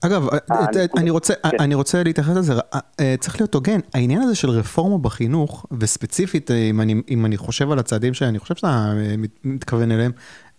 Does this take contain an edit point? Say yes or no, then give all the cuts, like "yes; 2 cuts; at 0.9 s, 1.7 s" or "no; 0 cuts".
no; 0 cuts